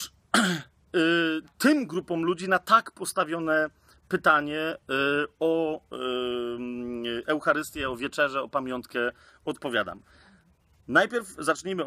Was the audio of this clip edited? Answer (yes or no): no